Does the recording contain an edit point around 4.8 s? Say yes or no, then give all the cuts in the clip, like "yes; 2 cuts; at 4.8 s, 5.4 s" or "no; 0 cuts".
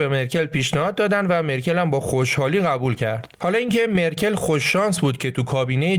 no; 1 cut; at 3.3 s